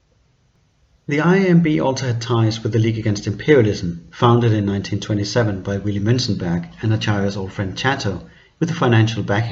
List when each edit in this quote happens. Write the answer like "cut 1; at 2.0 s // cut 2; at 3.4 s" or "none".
cut 1; at 1.0 s